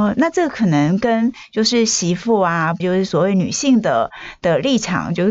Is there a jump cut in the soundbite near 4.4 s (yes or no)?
no